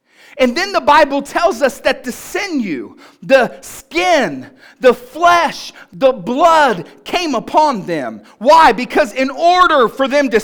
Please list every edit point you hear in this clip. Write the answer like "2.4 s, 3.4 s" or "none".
none